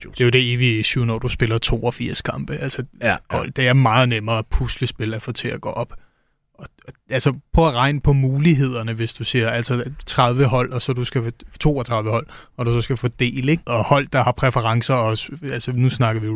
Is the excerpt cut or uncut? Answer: cut